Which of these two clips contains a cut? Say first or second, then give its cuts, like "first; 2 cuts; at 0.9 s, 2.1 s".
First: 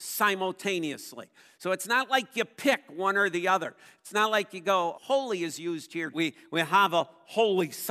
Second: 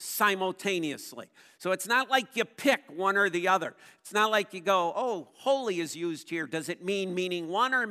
first; 2 cuts; at 4.9 s, 6.1 s